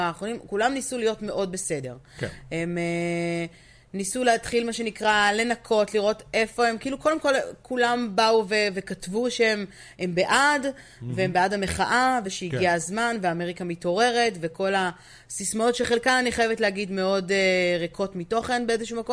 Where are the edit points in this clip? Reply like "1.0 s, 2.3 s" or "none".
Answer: 12.2 s